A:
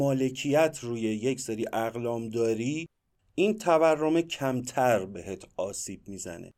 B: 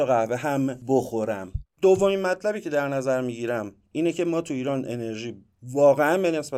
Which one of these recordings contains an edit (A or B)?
B